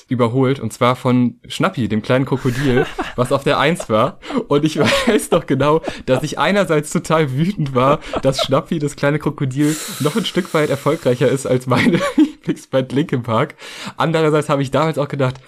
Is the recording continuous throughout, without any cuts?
yes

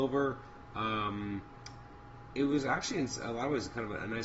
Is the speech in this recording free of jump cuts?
yes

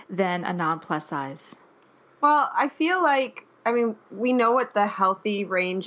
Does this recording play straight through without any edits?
yes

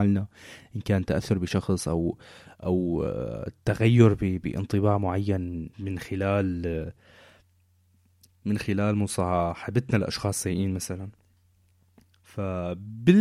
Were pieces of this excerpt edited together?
yes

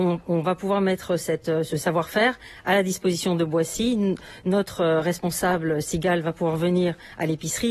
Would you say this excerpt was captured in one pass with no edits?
yes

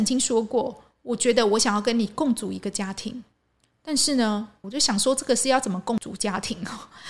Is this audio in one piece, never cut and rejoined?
no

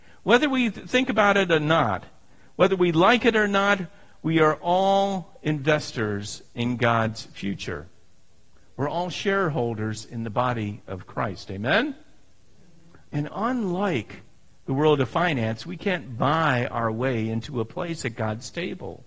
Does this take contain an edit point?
no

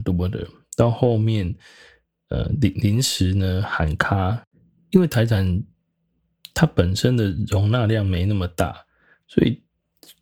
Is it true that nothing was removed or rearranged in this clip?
yes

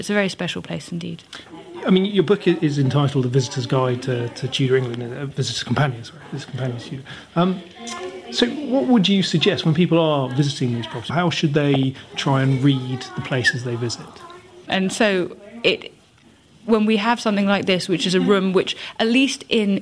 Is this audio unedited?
no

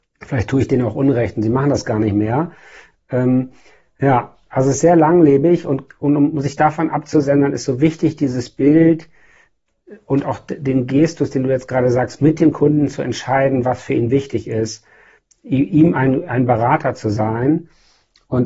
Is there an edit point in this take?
no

